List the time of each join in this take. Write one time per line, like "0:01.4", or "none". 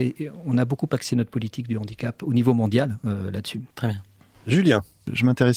0:03.7